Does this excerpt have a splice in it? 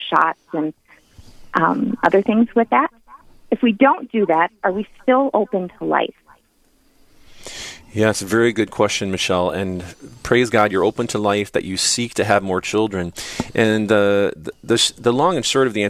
no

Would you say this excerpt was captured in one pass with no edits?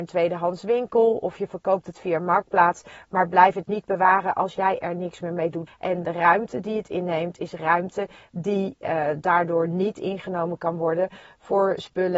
no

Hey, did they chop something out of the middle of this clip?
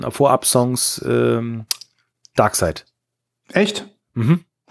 no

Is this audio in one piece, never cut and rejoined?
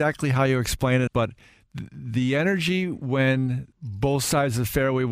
no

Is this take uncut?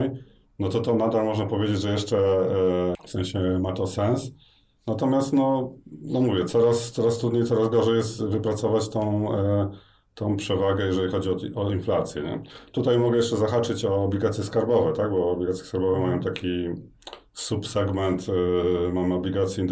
no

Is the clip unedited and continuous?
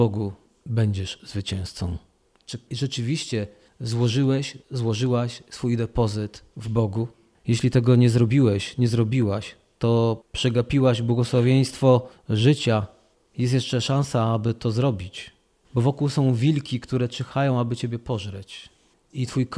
no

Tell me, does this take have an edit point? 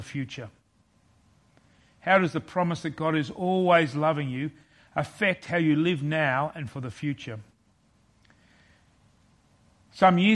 no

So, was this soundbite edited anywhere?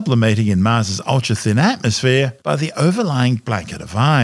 no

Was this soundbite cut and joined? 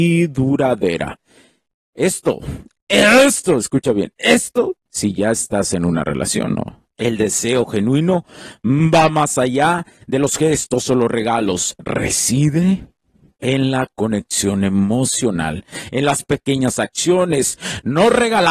yes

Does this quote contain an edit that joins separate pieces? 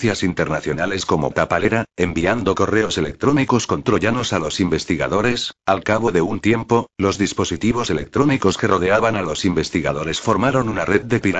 yes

